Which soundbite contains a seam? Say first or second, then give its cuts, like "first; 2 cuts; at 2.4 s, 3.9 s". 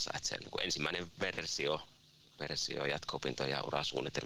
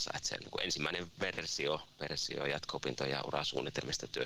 second; 1 cut; at 1.9 s